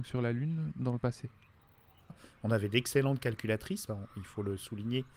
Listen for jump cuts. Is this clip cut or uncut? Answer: cut